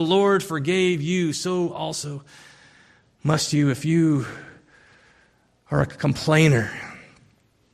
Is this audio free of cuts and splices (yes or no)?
yes